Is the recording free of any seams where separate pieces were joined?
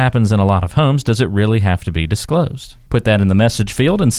no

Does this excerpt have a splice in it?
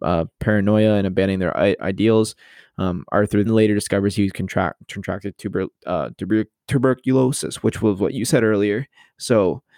yes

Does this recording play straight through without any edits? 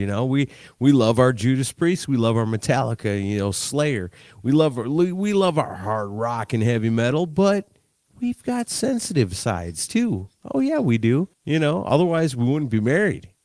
no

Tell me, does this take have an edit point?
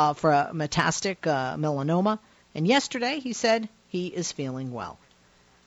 no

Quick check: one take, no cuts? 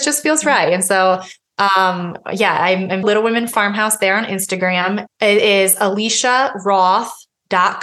no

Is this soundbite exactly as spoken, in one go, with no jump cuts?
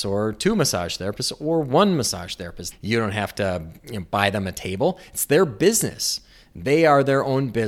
no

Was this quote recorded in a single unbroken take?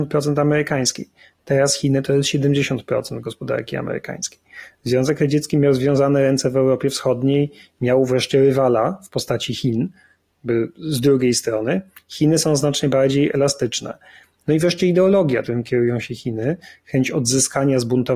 no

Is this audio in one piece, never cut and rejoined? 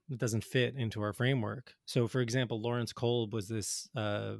no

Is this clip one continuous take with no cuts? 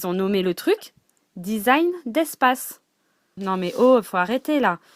no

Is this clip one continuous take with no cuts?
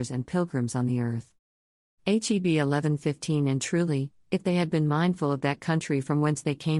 no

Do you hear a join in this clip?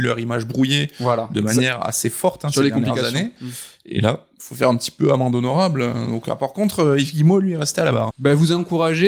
yes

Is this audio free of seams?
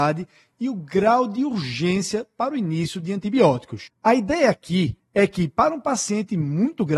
no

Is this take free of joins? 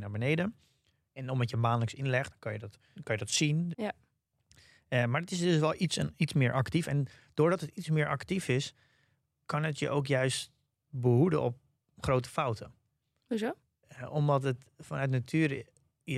no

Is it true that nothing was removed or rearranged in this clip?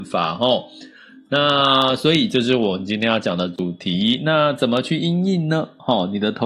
yes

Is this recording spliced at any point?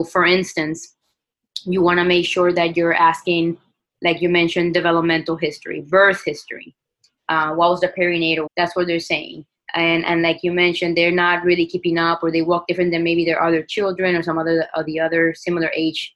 yes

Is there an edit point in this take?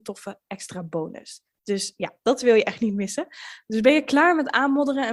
no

